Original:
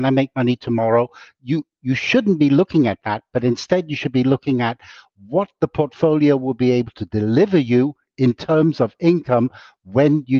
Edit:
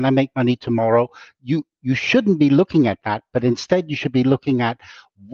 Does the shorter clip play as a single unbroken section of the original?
yes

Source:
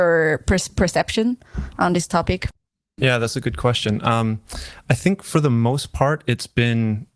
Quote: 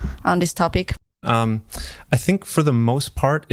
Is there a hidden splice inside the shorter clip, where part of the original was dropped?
yes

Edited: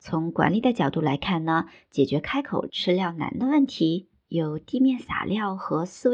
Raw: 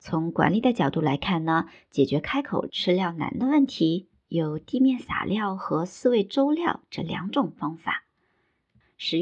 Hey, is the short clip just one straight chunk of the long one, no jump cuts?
yes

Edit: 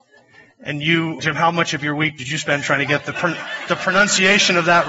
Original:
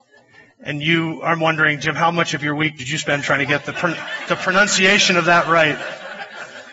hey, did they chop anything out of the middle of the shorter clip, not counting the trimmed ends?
yes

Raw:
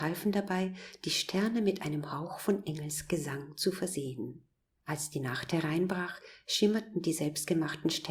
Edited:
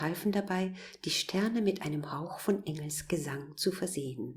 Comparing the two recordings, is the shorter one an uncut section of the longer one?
yes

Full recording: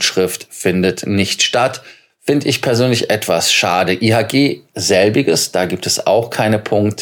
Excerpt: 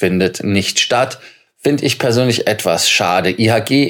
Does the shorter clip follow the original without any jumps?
yes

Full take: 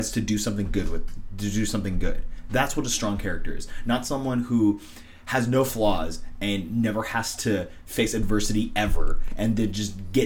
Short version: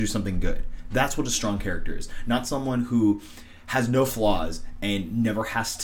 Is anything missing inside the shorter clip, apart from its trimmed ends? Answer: no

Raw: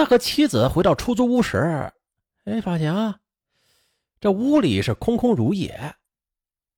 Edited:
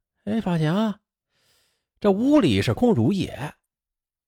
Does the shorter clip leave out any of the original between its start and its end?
yes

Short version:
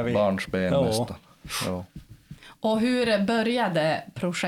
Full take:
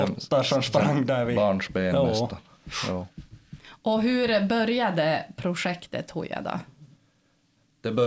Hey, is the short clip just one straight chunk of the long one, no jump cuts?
yes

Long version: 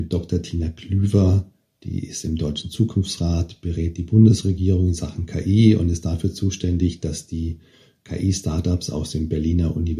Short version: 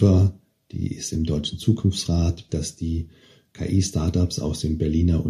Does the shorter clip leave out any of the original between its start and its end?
yes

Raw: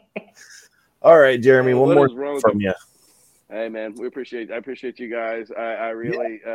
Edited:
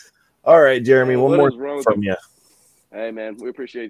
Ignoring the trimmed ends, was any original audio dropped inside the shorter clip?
no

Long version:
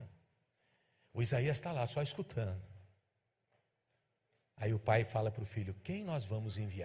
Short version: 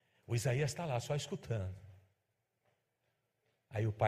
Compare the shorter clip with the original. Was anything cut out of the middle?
no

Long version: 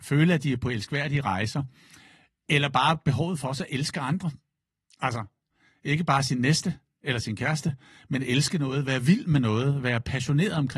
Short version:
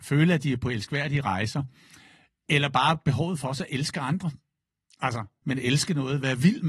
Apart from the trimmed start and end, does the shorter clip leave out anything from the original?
yes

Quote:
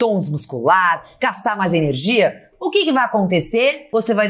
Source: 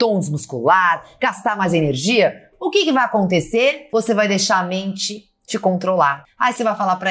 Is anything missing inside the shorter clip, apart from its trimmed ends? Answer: no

